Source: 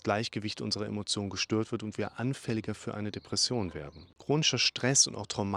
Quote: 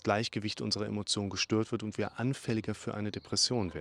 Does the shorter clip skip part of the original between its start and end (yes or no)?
no